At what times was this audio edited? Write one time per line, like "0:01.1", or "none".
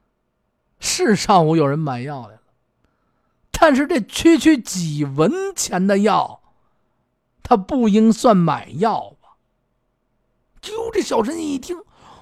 none